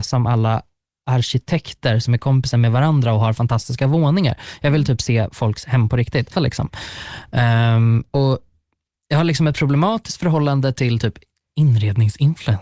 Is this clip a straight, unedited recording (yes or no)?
no